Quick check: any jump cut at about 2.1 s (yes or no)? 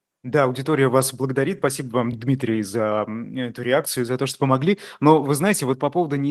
no